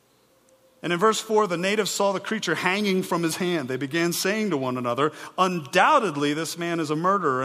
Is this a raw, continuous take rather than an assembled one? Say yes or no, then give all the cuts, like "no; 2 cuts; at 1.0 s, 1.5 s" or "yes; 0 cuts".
yes; 0 cuts